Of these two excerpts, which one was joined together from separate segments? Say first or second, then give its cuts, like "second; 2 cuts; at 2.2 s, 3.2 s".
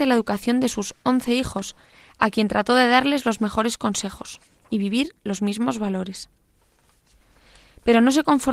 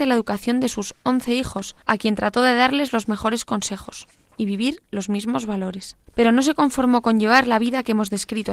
second; 2 cuts; at 1.8 s, 6.1 s